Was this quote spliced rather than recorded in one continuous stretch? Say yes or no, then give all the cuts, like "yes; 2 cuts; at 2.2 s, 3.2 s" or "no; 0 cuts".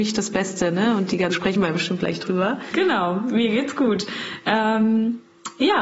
yes; 2 cuts; at 1.3 s, 2.7 s